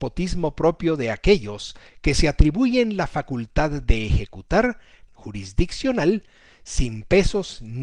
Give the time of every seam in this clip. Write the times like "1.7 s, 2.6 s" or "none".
5.1 s